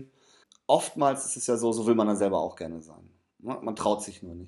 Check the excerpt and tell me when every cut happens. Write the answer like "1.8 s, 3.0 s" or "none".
none